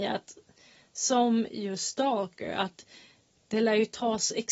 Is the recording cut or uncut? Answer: uncut